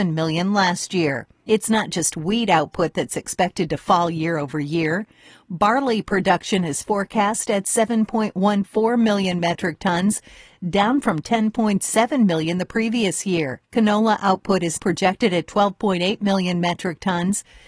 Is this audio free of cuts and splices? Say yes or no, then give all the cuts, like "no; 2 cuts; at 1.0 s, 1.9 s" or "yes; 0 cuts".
no; 3 cuts; at 1.5 s, 13.7 s, 14.8 s